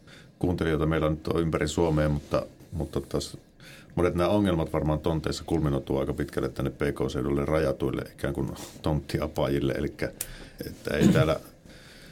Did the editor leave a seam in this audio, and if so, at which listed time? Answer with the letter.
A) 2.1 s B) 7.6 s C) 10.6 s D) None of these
C